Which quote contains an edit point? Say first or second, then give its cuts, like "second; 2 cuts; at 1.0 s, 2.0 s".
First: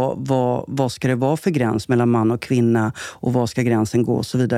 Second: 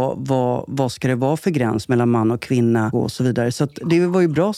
second; 1 cut; at 2.9 s